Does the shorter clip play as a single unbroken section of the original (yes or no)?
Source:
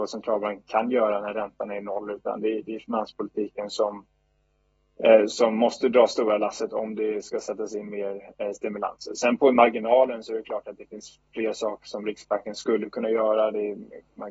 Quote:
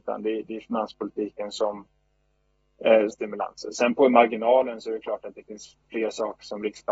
no